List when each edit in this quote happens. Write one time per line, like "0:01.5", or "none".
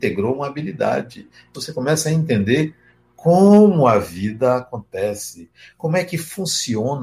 0:01.5

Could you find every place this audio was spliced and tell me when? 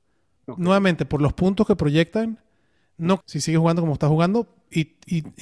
0:03.2

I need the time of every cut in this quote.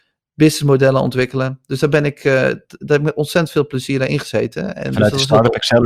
none

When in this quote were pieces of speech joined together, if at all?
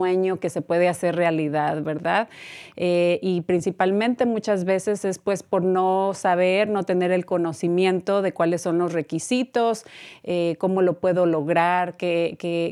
none

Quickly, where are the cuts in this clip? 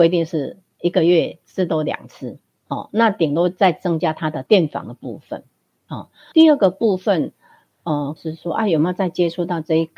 0:06.3
0:08.2

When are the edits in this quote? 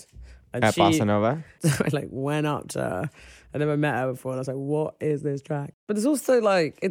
0:01.6
0:05.7

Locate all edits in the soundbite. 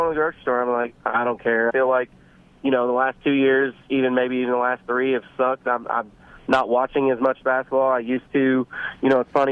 0:01.7

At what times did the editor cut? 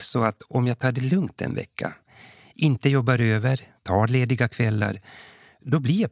none

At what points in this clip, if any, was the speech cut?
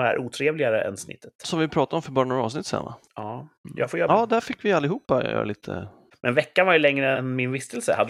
0:04.1
0:06.1
0:07.1

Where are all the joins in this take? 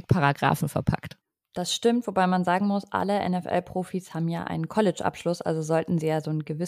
none

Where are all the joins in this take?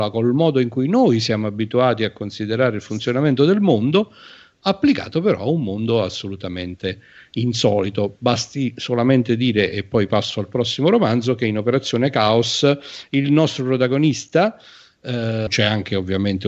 0:15.5

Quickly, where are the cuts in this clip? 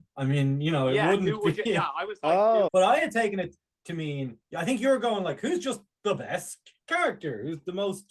0:02.7

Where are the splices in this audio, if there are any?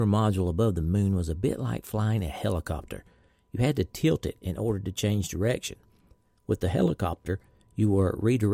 none

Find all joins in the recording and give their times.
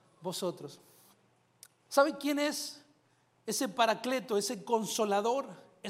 none

